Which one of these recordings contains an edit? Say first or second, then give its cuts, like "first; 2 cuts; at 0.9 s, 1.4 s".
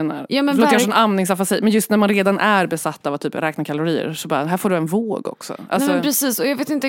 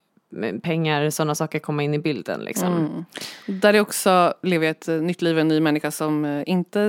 second; 1 cut; at 4.4 s